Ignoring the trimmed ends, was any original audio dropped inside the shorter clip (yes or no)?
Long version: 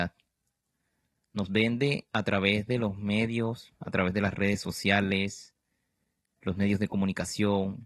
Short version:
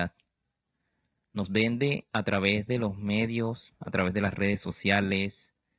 no